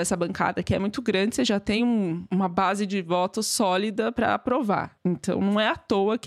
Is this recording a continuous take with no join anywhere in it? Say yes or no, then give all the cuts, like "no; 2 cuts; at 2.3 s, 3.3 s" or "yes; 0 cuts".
yes; 0 cuts